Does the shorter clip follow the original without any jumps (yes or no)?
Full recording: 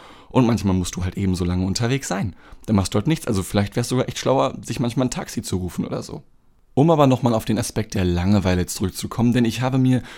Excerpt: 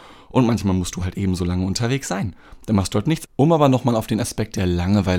no